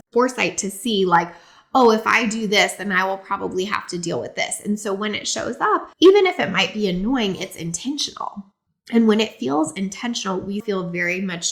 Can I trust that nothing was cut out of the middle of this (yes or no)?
no